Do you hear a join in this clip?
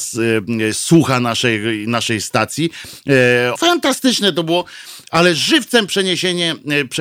yes; 1 cut; at 3.6 s

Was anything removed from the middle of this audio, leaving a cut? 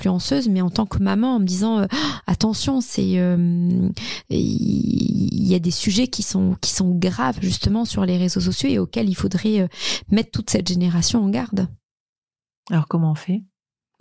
no; 0 cuts

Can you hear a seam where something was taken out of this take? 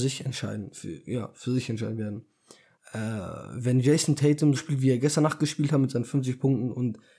yes; 2 cuts; at 2.7 s, 4.5 s

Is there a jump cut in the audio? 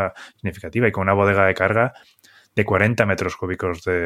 no; 0 cuts

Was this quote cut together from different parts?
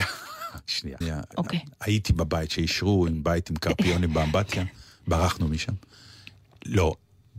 yes; 1 cut; at 1.0 s

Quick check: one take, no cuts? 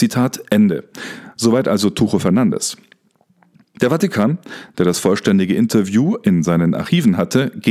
yes; 0 cuts

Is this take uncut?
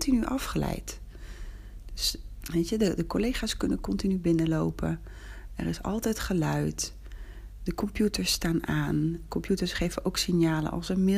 no; 1 cut; at 2.4 s

